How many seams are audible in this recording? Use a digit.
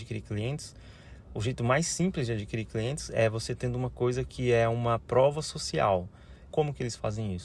2